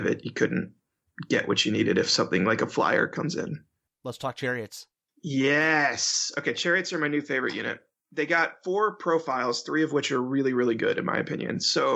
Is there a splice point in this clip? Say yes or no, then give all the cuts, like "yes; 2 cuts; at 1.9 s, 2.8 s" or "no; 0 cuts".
no; 0 cuts